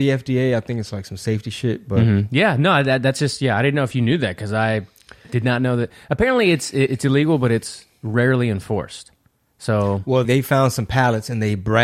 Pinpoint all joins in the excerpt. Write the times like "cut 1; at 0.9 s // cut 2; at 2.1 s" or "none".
cut 1; at 10.2 s